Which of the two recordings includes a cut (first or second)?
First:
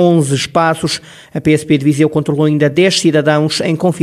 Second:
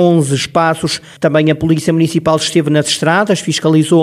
second